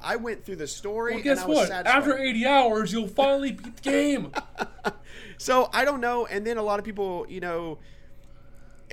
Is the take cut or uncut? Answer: uncut